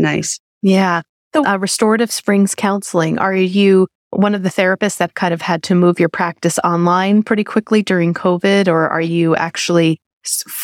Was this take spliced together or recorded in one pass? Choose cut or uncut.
cut